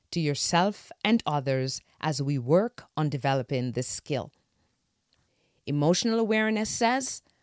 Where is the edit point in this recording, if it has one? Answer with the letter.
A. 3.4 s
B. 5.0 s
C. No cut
C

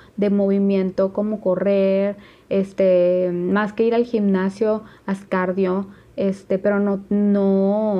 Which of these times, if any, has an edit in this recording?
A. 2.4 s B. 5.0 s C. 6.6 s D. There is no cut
D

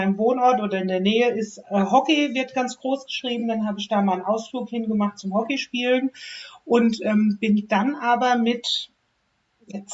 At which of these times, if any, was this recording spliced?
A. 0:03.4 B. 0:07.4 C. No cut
C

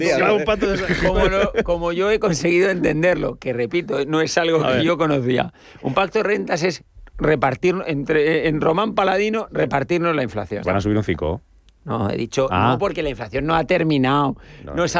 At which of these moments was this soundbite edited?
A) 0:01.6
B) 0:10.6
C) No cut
B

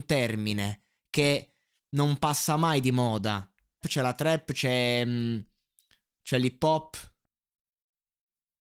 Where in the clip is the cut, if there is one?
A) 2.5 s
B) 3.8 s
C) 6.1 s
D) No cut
B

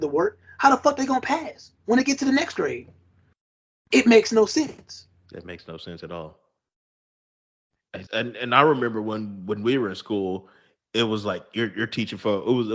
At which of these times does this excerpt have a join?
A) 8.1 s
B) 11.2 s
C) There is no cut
A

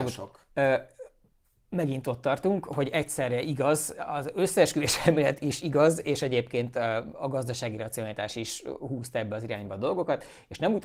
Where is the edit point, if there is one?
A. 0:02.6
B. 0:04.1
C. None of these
C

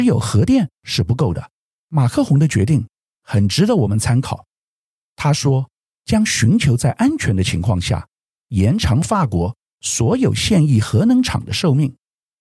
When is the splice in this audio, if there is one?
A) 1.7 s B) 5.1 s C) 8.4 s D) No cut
A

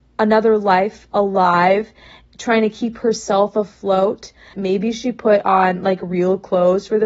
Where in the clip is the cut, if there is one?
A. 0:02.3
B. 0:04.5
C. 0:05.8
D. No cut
B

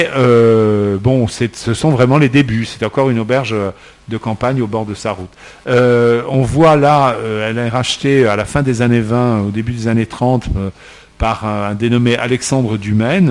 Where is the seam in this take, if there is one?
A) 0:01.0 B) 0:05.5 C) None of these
C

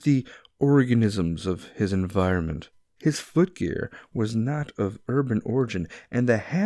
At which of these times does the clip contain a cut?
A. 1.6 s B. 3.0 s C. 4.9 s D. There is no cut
B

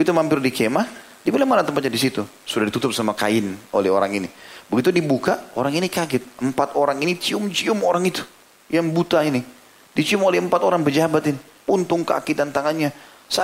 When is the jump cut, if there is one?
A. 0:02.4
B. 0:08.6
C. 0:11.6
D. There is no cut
C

